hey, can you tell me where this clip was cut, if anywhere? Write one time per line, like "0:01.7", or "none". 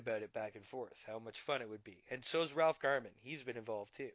none